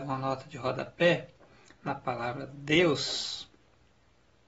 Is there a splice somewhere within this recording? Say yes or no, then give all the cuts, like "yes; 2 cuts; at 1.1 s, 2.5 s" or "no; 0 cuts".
no; 0 cuts